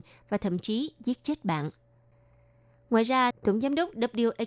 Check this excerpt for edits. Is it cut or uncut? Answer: cut